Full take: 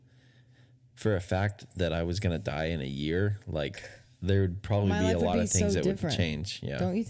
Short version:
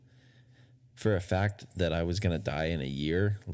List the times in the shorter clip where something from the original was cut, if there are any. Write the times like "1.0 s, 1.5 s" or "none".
none